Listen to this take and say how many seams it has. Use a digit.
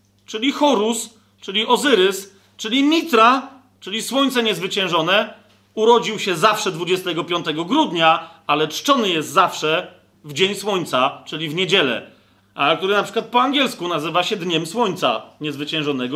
1